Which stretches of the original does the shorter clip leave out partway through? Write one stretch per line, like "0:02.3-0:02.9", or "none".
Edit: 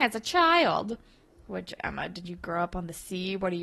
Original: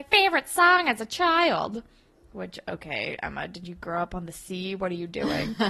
0:02.6-0:03.2